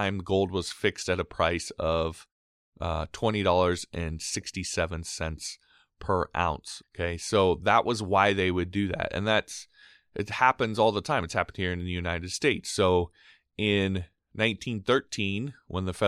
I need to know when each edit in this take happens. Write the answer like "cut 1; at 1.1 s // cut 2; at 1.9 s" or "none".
cut 1; at 6.8 s

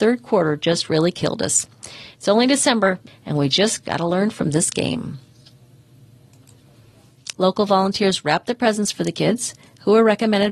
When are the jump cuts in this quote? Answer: cut 1; at 3.1 s // cut 2; at 7.3 s

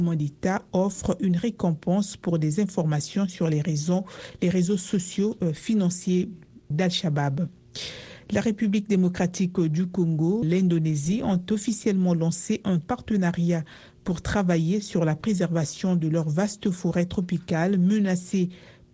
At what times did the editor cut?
cut 1; at 6.7 s // cut 2; at 10.4 s

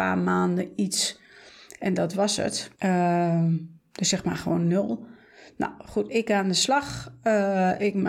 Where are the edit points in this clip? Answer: cut 1; at 2.7 s

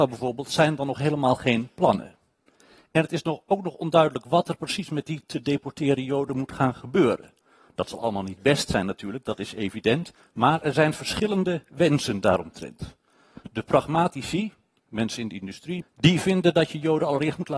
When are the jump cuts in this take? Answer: cut 1; at 15.8 s

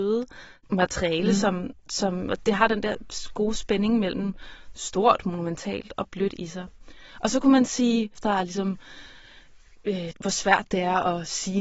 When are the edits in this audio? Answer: cut 1; at 8.2 s // cut 2; at 10.1 s

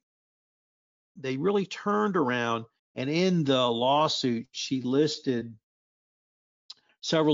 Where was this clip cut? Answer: cut 1; at 2.8 s

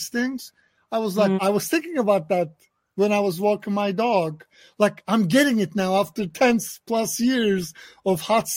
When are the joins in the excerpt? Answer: cut 1; at 1.4 s

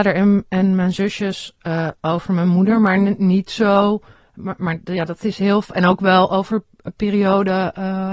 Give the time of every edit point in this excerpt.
none

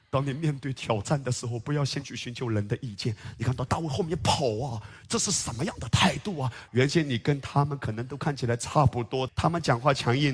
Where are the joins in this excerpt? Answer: cut 1; at 6.7 s // cut 2; at 9.3 s

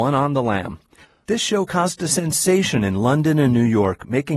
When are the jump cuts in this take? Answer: cut 1; at 1.2 s

